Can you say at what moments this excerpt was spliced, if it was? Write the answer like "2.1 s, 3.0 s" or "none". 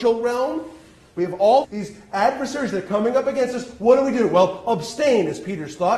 1.6 s